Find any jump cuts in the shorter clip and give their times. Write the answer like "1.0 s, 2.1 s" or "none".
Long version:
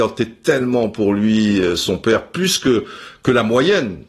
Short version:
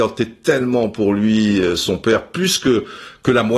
none